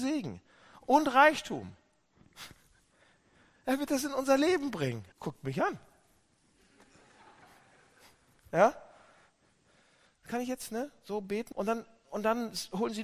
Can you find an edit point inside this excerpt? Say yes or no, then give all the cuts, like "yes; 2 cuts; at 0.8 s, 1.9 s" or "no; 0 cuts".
yes; 3 cuts; at 5.1 s, 10.1 s, 11.5 s